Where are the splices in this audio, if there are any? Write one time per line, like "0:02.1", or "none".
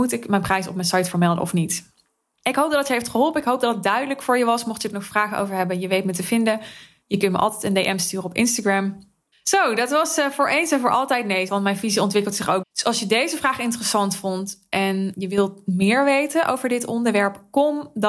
0:09.3
0:11.5
0:12.6